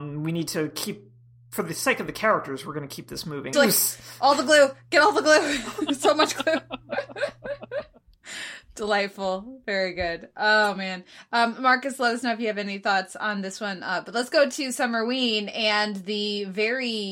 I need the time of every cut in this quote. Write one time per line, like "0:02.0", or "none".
0:03.5